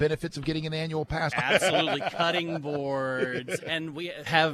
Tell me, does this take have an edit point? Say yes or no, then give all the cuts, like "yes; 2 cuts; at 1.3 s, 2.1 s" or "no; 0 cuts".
yes; 2 cuts; at 1.3 s, 3.6 s